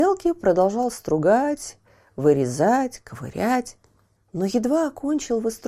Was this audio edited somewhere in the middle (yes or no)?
yes